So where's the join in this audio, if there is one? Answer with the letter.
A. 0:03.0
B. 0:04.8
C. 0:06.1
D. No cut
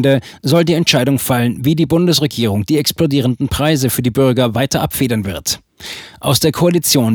D